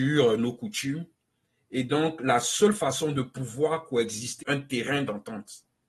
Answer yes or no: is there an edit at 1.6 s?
no